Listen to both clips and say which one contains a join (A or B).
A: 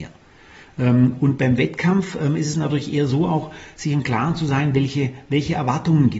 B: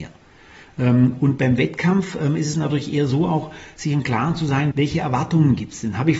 B